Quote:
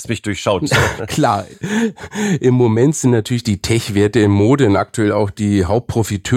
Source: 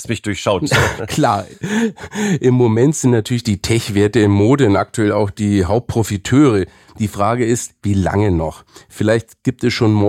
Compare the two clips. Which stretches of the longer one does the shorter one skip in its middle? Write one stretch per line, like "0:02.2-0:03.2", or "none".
none